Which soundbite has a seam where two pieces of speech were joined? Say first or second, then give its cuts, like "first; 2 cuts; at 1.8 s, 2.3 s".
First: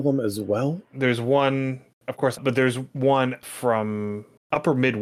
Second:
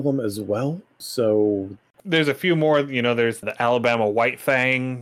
first; 2 cuts; at 0.9 s, 2.3 s